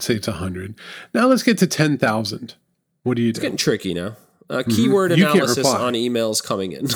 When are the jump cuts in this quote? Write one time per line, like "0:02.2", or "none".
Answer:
none